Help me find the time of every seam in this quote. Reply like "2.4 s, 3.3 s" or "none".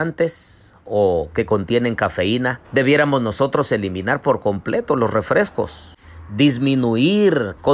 2.6 s